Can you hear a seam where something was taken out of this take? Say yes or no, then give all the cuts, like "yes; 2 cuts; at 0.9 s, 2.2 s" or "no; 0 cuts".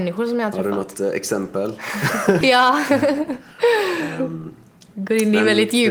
yes; 1 cut; at 2.4 s